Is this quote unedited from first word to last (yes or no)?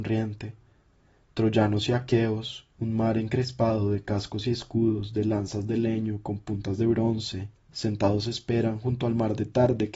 yes